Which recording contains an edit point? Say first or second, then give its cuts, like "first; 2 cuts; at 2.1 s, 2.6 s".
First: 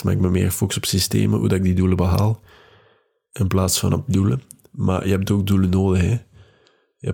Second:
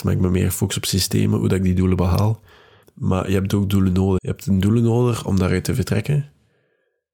second; 2 cuts; at 2.8 s, 4.2 s